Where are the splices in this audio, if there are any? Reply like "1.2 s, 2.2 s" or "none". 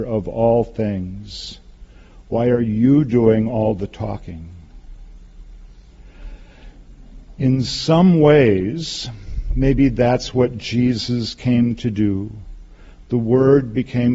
none